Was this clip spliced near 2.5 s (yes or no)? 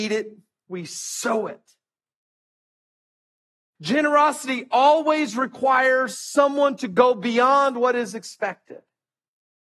no